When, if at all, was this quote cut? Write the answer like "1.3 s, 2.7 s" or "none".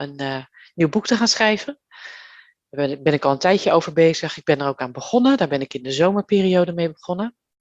none